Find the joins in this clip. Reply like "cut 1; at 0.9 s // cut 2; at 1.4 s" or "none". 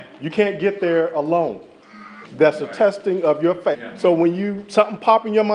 cut 1; at 2.2 s // cut 2; at 3.7 s